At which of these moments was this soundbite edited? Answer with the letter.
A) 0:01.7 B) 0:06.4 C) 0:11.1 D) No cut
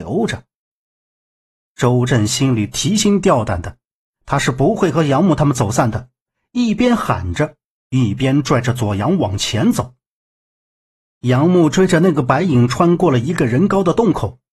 A